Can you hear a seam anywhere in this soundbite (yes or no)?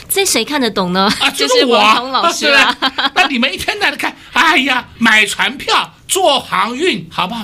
no